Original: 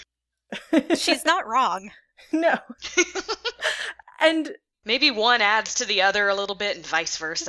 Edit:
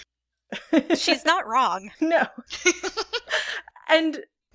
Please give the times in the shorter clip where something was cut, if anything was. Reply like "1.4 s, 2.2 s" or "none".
1.9 s